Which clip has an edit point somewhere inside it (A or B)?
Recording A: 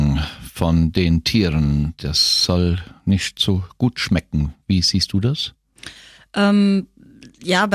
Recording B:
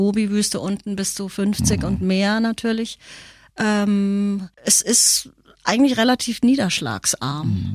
B